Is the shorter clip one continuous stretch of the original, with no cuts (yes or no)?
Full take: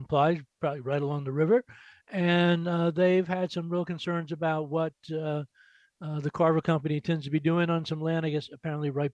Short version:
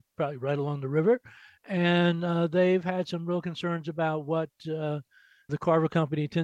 no